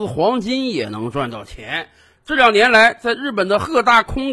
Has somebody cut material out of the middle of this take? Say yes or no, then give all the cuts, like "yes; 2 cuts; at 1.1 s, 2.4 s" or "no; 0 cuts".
yes; 1 cut; at 2.2 s